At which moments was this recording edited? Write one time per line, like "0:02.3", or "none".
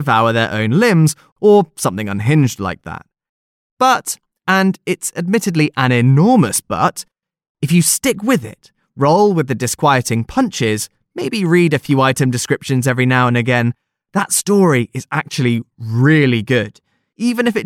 none